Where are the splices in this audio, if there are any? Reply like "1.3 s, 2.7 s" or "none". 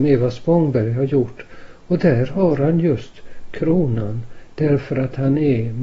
none